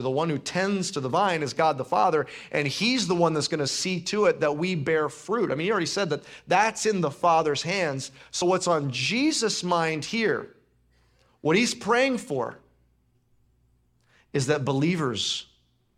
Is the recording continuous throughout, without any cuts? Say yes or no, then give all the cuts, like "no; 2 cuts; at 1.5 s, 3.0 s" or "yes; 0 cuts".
yes; 0 cuts